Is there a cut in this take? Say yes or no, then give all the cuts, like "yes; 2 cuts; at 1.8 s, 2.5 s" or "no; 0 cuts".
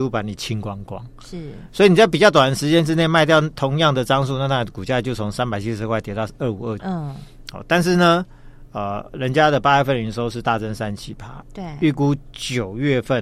yes; 1 cut; at 6.8 s